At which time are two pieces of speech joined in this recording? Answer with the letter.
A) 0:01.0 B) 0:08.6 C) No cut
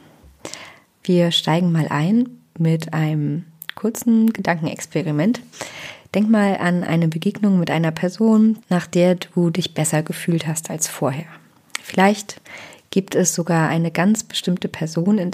B